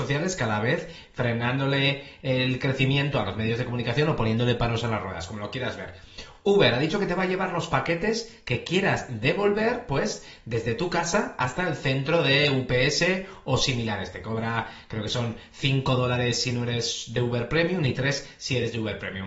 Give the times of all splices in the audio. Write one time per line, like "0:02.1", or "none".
none